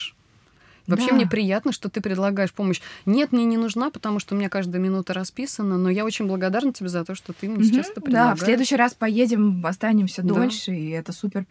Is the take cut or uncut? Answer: uncut